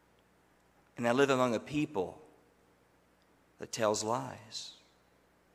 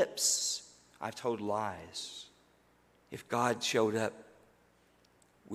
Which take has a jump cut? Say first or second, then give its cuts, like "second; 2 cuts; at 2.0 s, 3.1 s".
second; 1 cut; at 2.9 s